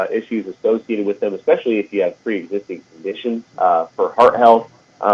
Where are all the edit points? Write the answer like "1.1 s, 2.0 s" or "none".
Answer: 3.5 s